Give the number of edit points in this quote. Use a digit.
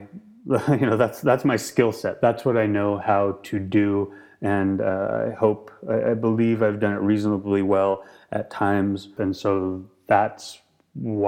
1